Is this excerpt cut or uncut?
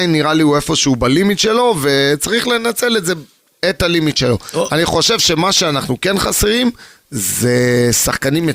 uncut